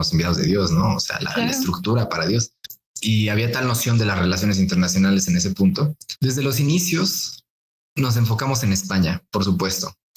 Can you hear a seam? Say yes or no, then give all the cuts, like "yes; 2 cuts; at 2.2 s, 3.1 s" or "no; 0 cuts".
no; 0 cuts